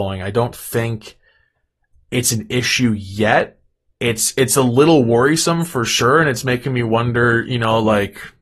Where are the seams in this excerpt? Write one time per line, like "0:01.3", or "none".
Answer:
none